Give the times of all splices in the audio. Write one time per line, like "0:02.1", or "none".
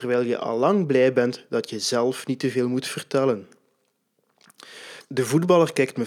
0:05.0